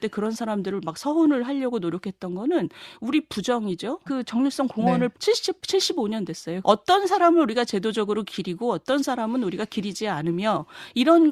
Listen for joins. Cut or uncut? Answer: cut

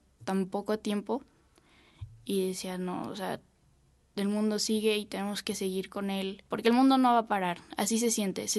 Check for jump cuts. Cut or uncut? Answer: cut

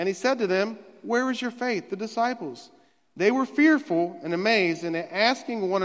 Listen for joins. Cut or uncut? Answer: uncut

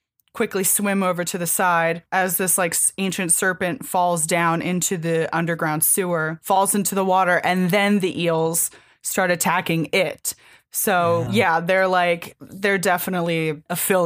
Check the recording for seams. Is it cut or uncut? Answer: cut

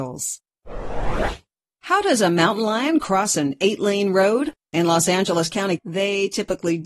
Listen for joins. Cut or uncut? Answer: cut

